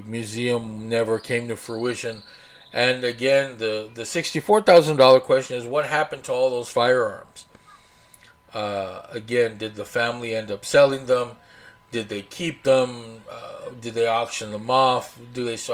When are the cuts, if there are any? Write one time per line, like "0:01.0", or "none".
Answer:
none